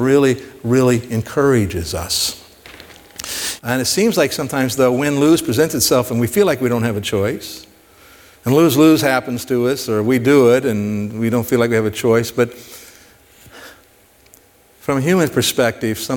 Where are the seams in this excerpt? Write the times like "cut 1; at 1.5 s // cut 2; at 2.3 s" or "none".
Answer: cut 1; at 3.6 s